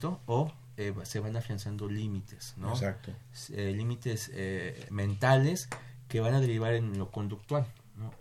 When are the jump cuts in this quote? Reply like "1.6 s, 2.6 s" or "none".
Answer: none